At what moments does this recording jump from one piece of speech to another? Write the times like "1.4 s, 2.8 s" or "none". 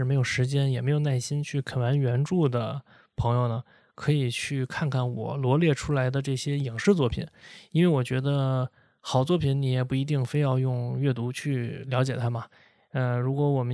none